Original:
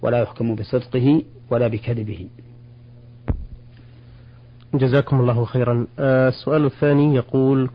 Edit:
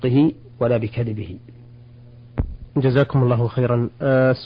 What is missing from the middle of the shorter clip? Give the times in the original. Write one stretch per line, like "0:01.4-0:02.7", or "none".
0:03.6-0:04.7